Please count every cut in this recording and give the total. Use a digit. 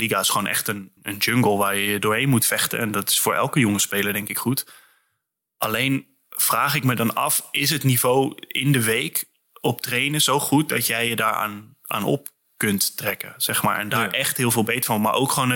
1